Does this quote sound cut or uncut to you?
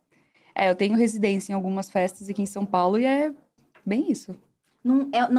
uncut